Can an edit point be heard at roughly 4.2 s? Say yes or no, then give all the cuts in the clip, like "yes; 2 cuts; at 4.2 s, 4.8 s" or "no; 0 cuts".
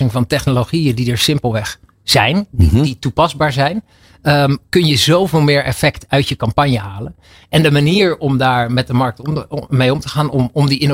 no; 0 cuts